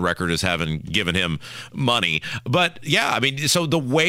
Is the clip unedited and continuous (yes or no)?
yes